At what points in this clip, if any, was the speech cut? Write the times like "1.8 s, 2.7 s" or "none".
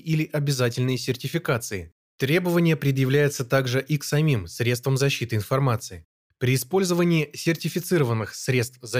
2.1 s, 6.3 s